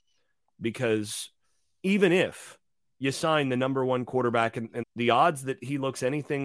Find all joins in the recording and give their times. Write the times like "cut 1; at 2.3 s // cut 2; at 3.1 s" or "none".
cut 1; at 4.8 s